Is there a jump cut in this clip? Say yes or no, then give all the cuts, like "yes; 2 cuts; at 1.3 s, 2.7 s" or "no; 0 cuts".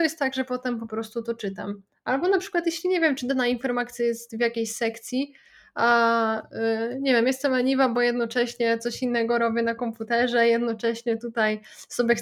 no; 0 cuts